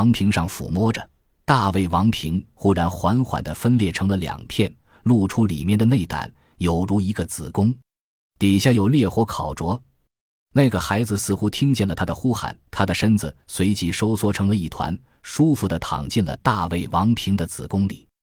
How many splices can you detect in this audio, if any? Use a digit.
2